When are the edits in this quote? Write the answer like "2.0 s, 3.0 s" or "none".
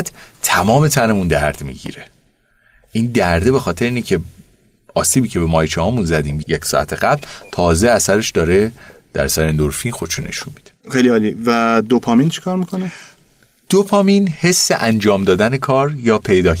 6.4 s, 10.8 s